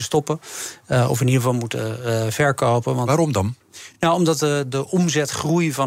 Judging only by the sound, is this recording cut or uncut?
uncut